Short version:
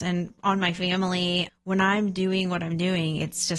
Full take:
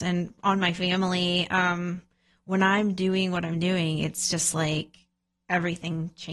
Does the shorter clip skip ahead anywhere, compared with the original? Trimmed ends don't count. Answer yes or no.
yes